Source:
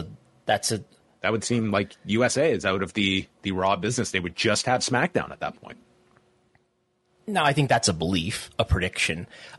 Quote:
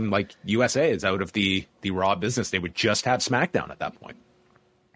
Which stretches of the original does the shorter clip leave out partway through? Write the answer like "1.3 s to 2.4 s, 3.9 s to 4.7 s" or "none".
none